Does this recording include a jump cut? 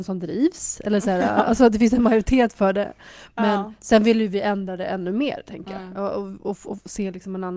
no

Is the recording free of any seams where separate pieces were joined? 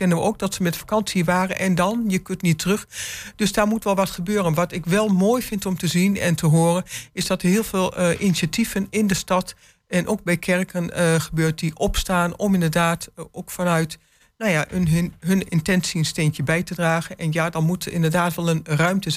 yes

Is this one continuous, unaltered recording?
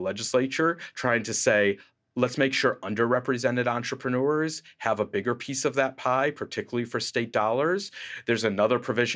yes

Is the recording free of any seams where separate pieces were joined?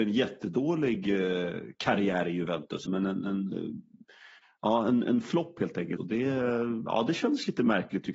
no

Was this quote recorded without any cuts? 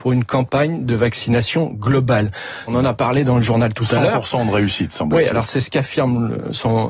no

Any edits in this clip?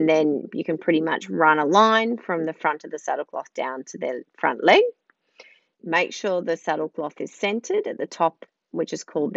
yes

